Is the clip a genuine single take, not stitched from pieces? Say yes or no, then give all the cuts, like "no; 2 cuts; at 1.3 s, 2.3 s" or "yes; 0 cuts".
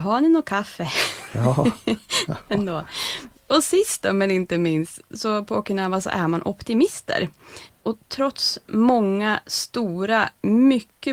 yes; 0 cuts